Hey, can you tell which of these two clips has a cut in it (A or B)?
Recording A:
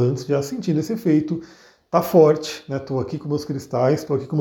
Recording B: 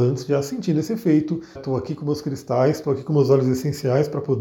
B